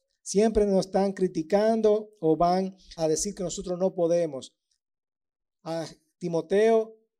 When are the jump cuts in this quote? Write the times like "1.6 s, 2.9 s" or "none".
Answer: 3.0 s